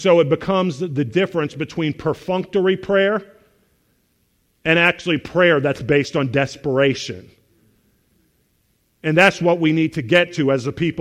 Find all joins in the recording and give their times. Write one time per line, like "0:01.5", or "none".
none